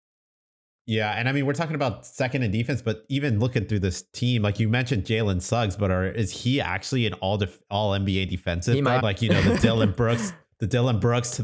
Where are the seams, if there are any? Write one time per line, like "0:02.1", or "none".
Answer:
0:09.0